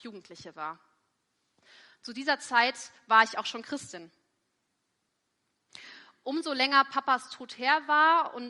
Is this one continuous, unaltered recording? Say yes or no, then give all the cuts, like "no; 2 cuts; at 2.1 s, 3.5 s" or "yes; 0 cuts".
yes; 0 cuts